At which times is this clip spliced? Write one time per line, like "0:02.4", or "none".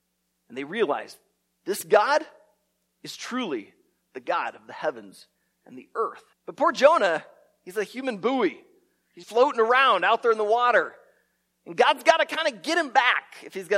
0:06.3
0:09.2